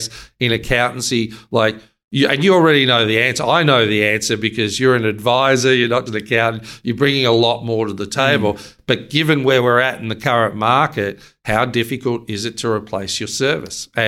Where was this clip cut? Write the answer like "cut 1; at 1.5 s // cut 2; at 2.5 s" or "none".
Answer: cut 1; at 6.1 s